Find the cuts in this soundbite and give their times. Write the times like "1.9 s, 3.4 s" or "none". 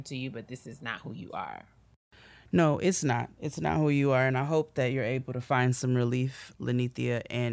6.5 s